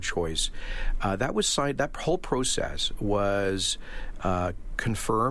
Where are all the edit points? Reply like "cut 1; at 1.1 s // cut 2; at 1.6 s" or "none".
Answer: none